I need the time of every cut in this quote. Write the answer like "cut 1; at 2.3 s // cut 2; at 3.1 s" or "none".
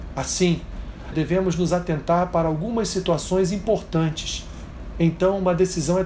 cut 1; at 1.1 s // cut 2; at 4.9 s